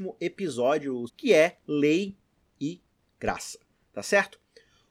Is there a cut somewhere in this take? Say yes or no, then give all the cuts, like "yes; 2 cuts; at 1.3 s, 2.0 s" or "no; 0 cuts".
yes; 1 cut; at 1.1 s